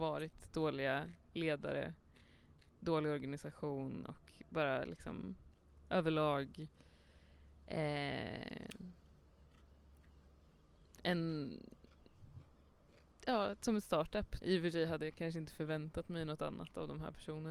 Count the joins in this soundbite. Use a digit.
1